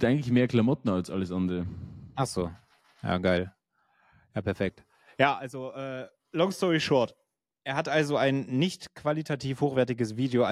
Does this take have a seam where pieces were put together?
no; 0 cuts

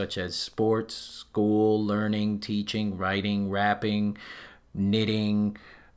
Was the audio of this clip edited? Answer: no; 0 cuts

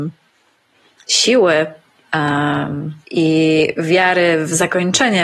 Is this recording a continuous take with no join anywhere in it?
no; 1 cut; at 3.0 s

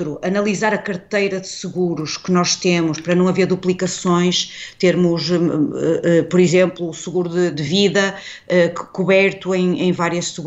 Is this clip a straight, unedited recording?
no; 1 cut; at 7.5 s

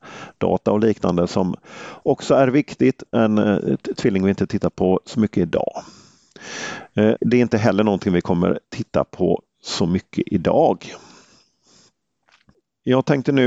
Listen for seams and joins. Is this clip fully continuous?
no; 2 cuts; at 3.1 s, 7.2 s

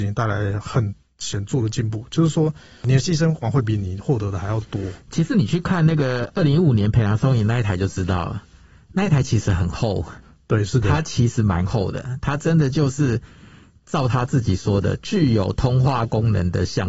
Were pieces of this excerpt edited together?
yes; 1 cut; at 3.4 s

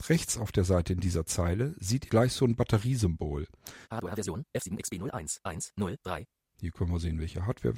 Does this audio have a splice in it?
yes; 2 cuts; at 2.1 s, 3.8 s

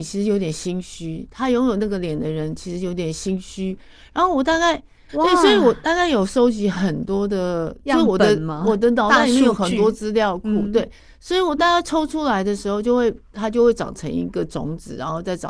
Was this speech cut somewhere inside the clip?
yes; 1 cut; at 5.1 s

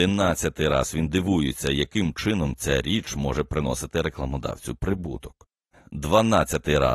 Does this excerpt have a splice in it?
no; 0 cuts

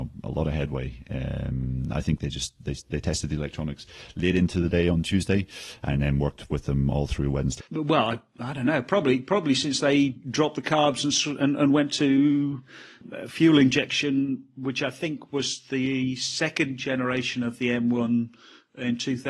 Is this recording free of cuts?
no; 1 cut; at 7.6 s

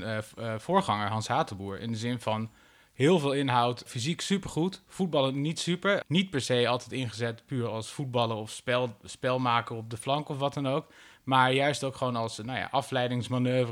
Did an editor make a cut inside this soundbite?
yes; 2 cuts; at 3.9 s, 6.0 s

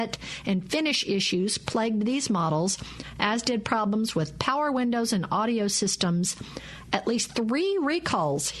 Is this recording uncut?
yes; 0 cuts

